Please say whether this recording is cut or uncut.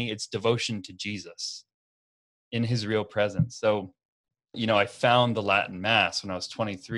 cut